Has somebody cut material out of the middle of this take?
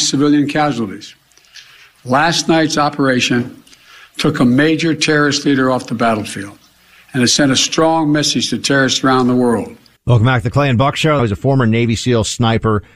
yes; 2 cuts; at 10.0 s, 11.2 s

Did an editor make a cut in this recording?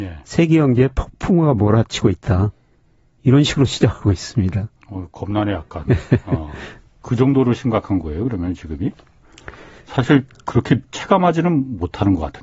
no; 0 cuts

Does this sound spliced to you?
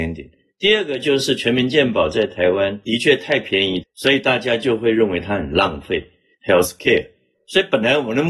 yes; 2 cuts; at 3.8 s, 6.4 s

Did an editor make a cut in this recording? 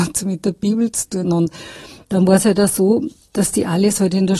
yes; 1 cut; at 1.2 s

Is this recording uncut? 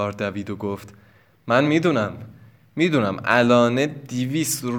yes; 0 cuts

